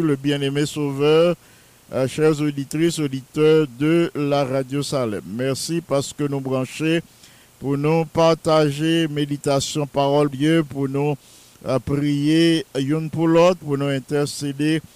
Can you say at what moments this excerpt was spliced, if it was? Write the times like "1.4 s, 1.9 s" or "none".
10.3 s, 13.6 s